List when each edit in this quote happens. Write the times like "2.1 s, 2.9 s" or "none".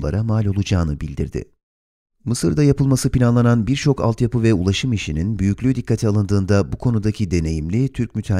2.1 s